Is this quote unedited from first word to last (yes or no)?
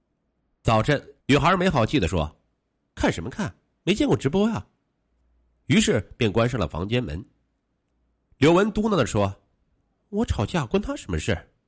no